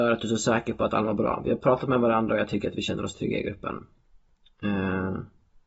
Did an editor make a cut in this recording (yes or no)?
no